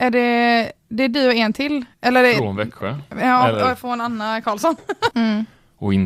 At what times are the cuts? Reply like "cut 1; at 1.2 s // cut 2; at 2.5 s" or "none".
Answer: cut 1; at 1.9 s // cut 2; at 5.1 s